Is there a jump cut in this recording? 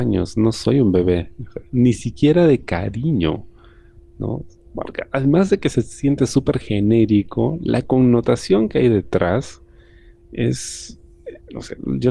no; 0 cuts

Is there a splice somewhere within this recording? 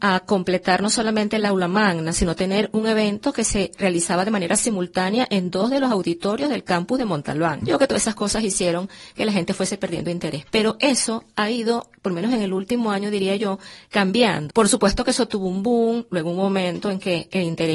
yes; 2 cuts; at 7.6 s, 14.5 s

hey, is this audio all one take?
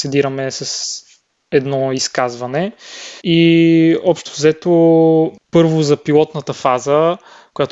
no; 1 cut; at 3.2 s

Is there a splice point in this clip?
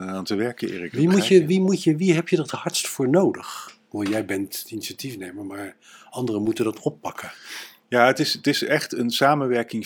no; 0 cuts

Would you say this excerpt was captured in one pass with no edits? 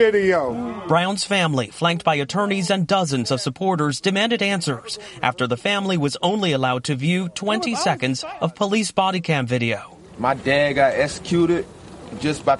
yes; 0 cuts

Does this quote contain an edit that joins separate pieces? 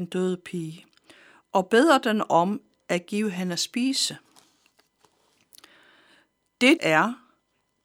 yes; 1 cut; at 6.8 s

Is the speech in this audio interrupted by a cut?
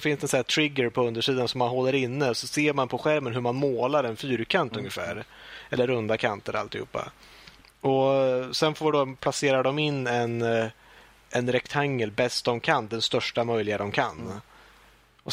no; 0 cuts

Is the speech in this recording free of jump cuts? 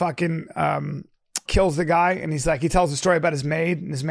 no; 1 cut; at 1.5 s

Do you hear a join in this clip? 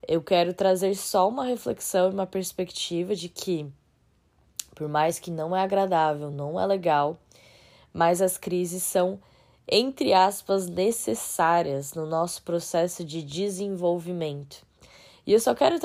no; 0 cuts

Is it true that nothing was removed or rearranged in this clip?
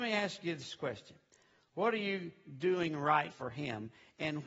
no; 1 cut; at 3.3 s

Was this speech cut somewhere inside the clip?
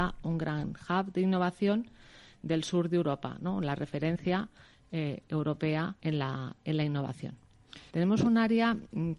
yes; 2 cuts; at 6.0 s, 7.9 s

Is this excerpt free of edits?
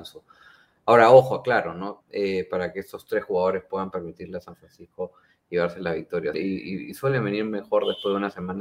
no; 2 cuts; at 2.0 s, 6.3 s

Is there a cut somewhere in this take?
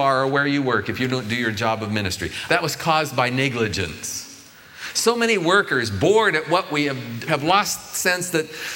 yes; 2 cuts; at 2.5 s, 7.3 s

